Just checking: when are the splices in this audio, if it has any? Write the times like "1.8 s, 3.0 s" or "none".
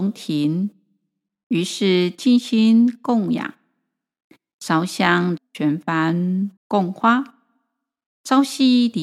5.4 s, 6.6 s